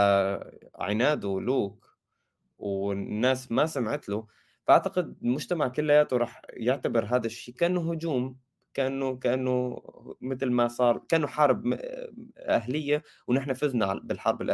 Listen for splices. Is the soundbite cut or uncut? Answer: cut